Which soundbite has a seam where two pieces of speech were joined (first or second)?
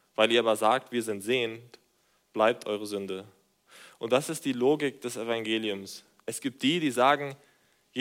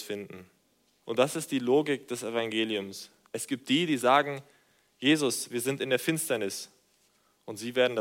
second